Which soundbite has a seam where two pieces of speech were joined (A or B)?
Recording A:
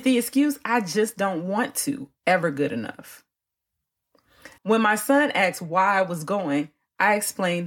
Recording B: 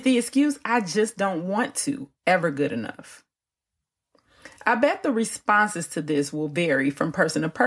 A